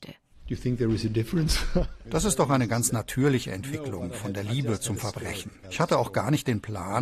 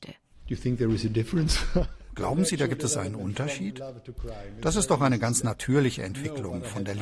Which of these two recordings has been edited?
first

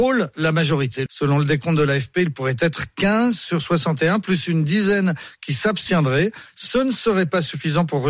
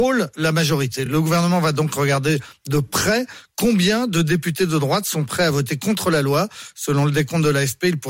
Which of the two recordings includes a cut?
first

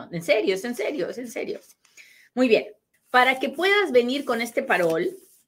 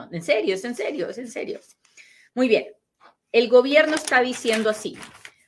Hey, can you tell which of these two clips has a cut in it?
first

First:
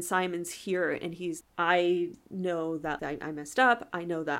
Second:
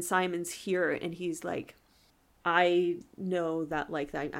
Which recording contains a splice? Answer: first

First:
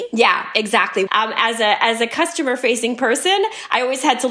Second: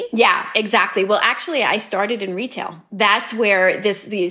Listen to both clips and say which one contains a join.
first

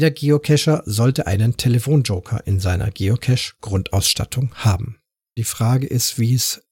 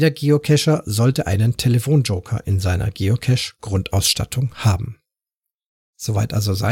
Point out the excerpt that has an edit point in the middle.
first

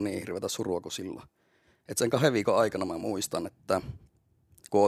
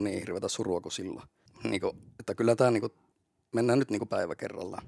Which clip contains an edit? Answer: second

